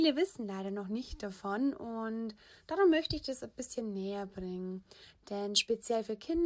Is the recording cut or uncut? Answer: uncut